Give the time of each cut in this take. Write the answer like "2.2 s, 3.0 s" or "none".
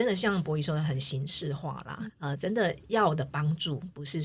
2.1 s